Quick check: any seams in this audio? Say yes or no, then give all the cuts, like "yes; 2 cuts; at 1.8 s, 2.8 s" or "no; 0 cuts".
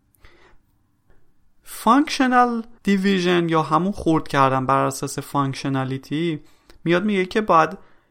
yes; 1 cut; at 2.8 s